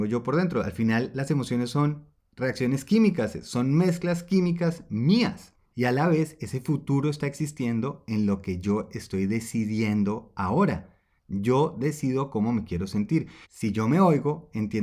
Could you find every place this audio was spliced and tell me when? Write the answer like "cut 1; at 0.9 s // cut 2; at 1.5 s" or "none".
cut 1; at 5.7 s // cut 2; at 11.2 s // cut 3; at 13.4 s

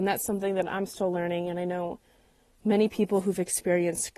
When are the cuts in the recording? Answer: none

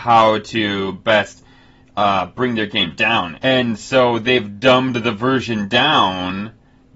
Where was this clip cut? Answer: cut 1; at 3.3 s

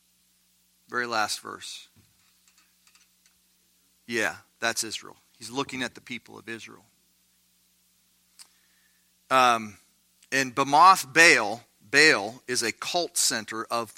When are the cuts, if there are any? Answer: none

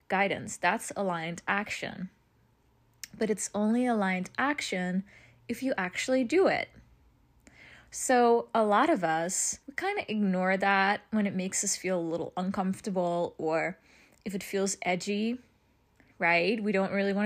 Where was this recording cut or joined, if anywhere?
cut 1; at 9.6 s

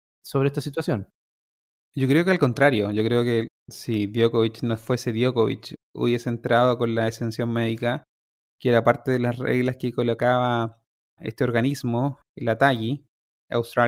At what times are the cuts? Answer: cut 1; at 12.2 s

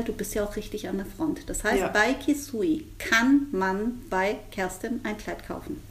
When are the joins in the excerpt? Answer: none

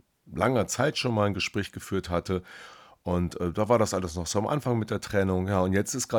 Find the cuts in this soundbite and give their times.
none

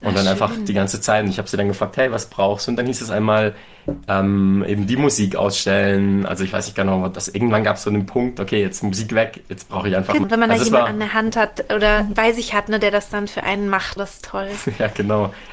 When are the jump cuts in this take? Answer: cut 1; at 10.2 s // cut 2; at 14.0 s

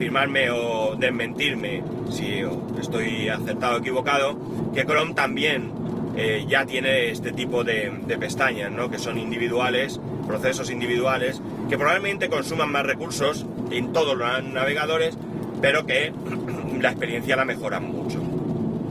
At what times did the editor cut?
none

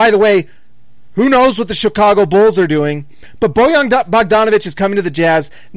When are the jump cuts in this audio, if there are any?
none

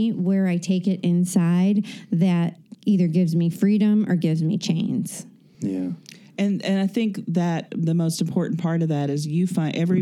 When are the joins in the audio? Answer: none

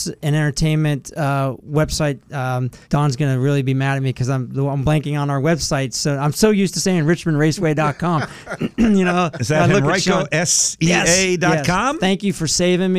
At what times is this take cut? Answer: cut 1; at 2.8 s

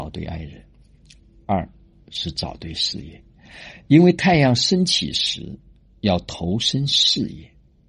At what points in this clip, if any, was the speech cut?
none

